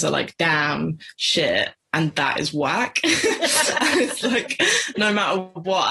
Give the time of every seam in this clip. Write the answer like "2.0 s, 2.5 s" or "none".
none

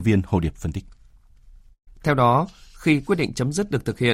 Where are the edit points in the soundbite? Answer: 1.9 s

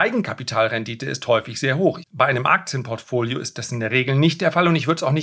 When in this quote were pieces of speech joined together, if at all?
2.0 s

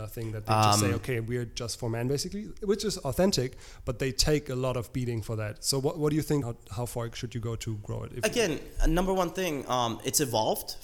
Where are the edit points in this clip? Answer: 6.4 s

